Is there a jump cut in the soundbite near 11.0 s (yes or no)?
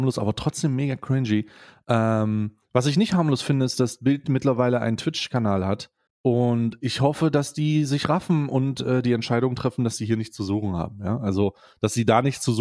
no